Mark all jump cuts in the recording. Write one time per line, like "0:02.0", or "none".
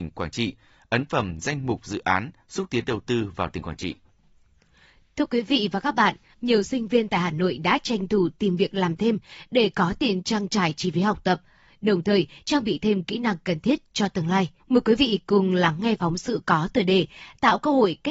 0:06.3
0:14.6

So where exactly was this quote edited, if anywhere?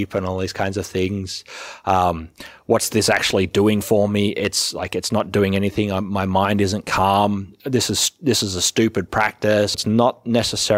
0:09.7

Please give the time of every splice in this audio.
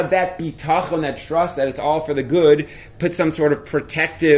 none

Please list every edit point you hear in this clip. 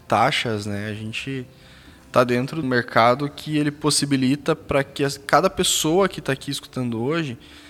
0:02.6

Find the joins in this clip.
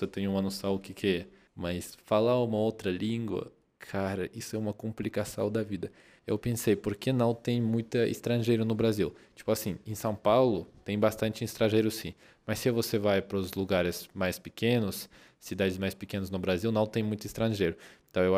0:01.5

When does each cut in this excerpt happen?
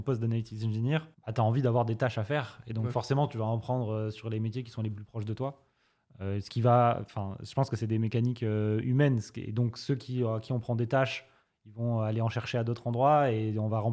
0:01.1

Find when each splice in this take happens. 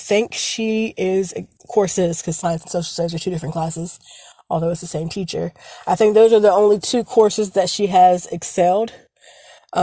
none

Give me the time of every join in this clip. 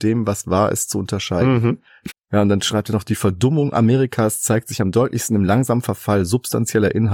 0:02.1

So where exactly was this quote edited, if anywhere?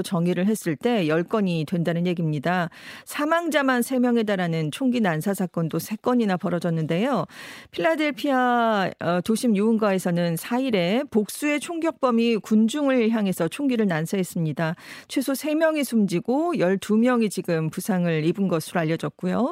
none

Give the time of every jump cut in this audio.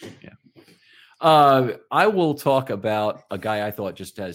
none

